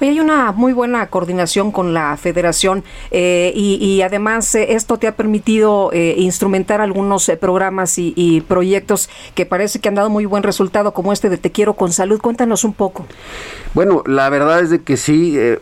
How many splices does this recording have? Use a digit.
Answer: 0